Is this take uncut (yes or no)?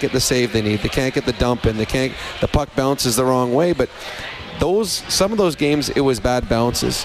yes